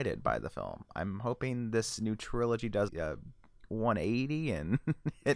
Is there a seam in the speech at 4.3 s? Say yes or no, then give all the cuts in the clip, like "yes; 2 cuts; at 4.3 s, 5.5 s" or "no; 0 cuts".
no; 1 cut; at 2.9 s